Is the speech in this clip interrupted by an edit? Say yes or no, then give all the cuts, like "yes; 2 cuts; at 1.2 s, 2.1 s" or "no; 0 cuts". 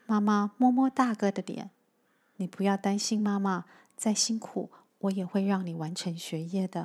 no; 0 cuts